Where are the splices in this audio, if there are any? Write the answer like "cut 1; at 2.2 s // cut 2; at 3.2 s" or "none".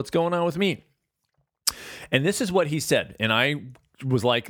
none